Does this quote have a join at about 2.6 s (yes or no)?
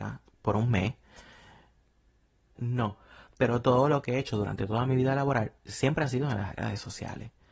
yes